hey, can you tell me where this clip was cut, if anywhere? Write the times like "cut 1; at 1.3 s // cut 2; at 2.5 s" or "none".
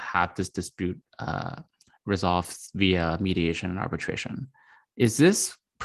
none

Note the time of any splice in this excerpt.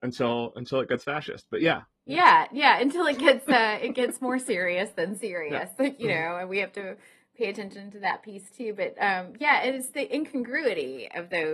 none

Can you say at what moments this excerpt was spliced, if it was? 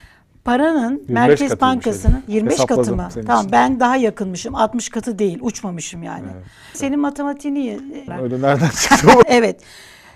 cut 1; at 6.7 s // cut 2; at 8.1 s // cut 3; at 9.2 s

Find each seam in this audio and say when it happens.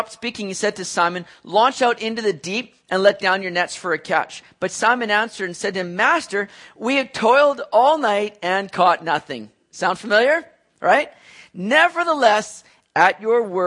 none

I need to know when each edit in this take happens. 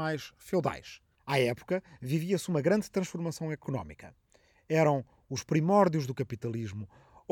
cut 1; at 1.2 s

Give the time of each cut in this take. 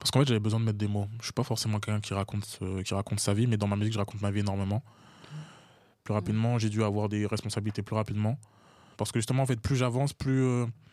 cut 1; at 5.9 s // cut 2; at 8.9 s

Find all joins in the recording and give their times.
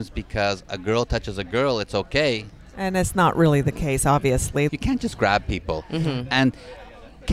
cut 1; at 4.7 s

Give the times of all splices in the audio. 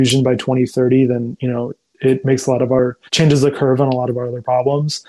cut 1; at 3.1 s

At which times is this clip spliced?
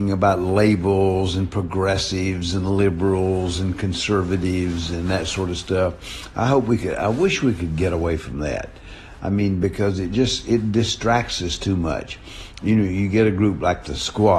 none

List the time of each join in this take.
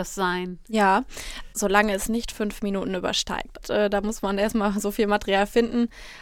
cut 1; at 1.5 s // cut 2; at 3.6 s

